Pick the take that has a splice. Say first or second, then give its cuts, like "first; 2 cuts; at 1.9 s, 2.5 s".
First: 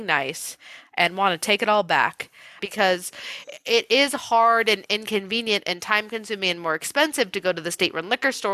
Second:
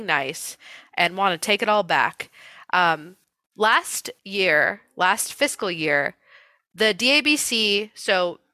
first; 1 cut; at 2.6 s